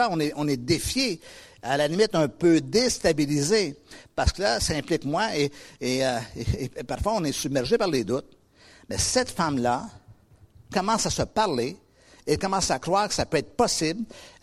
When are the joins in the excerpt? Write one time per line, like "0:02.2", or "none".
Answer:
none